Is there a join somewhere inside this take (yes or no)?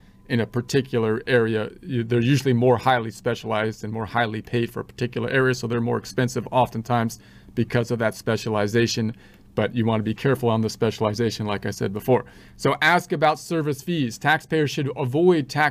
no